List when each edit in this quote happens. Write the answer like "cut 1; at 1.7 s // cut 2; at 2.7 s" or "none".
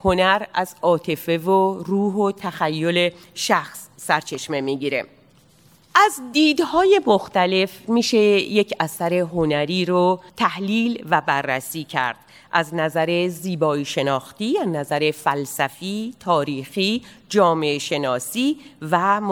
cut 1; at 10.3 s